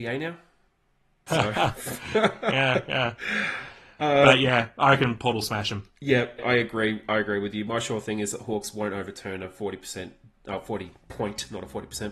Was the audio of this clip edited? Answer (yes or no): yes